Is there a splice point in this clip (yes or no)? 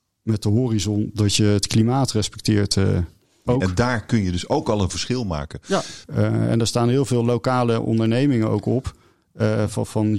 yes